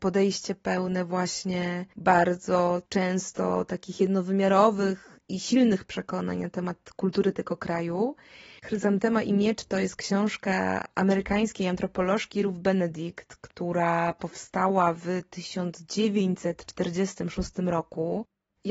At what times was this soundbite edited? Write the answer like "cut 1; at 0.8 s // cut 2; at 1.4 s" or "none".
cut 1; at 8.6 s